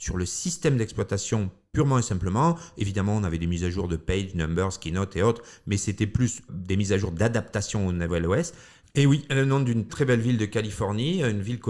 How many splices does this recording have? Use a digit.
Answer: 3